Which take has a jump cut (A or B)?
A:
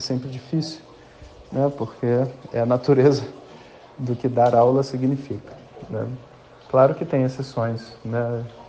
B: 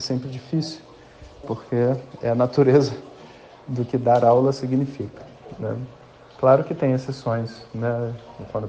B